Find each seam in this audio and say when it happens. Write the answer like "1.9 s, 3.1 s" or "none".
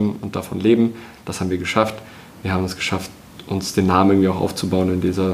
none

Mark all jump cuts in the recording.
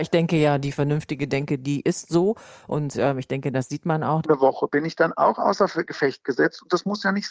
4.2 s

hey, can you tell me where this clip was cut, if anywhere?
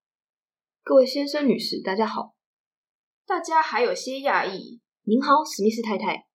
4.9 s

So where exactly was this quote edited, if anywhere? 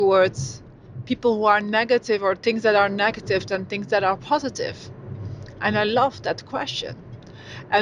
none

